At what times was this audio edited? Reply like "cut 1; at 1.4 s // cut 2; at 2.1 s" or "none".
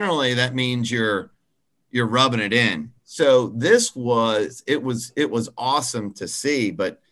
cut 1; at 3.0 s